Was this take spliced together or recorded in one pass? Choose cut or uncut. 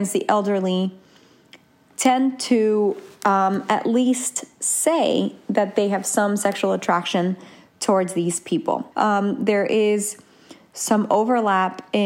cut